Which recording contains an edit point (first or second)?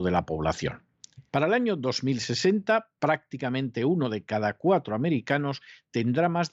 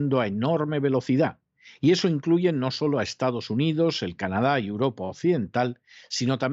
first